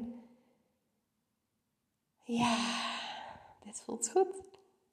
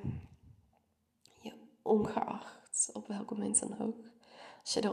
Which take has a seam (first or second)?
first